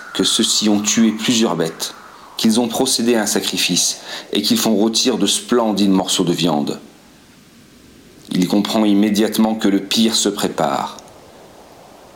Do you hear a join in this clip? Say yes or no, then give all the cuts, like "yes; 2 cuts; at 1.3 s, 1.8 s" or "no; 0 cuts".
no; 0 cuts